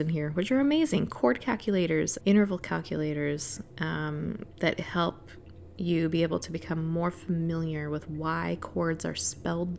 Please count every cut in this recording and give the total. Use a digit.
1